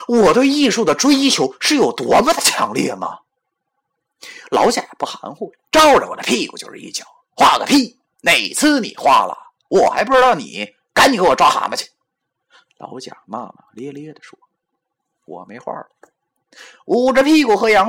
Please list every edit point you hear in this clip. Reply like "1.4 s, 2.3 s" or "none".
none